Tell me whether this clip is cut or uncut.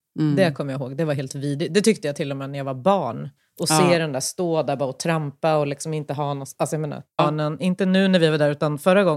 cut